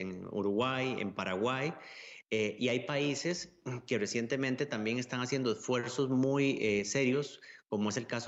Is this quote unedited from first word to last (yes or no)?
yes